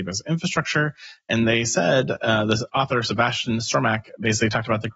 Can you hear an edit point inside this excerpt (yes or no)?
no